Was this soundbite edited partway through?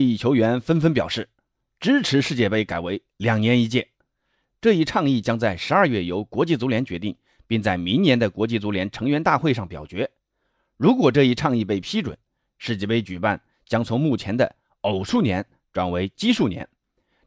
no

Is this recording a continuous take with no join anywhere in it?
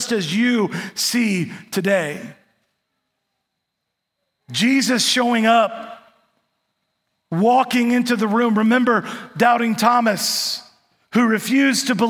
yes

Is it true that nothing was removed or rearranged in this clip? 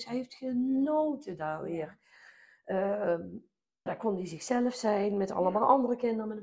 no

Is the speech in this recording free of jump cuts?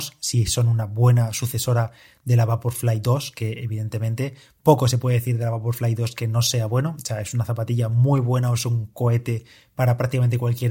yes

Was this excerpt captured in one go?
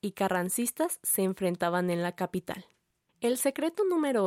yes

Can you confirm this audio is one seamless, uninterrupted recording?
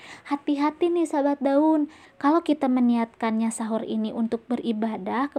no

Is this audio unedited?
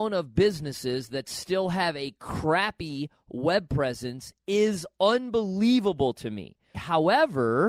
no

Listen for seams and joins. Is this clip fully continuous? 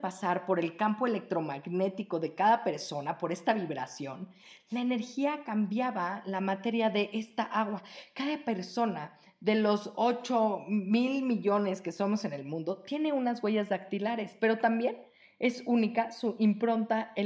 yes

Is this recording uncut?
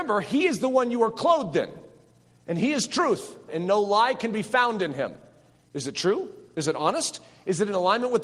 no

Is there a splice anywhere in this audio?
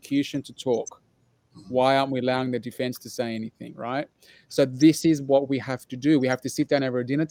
no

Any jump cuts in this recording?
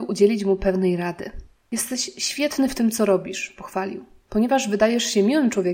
no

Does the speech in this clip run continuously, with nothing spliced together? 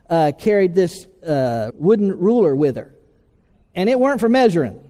no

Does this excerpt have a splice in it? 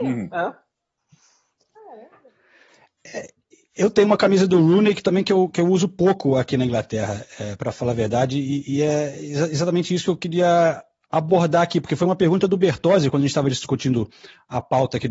no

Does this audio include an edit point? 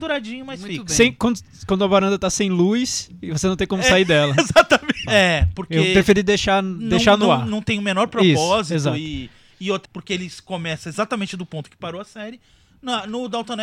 yes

